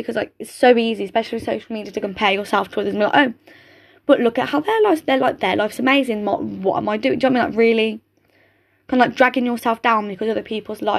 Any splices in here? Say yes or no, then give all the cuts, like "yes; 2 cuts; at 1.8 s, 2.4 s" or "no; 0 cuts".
no; 0 cuts